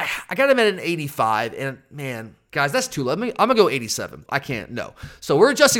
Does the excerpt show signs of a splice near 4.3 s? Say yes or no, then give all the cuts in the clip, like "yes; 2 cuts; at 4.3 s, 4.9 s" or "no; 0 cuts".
yes; 2 cuts; at 2.5 s, 4.3 s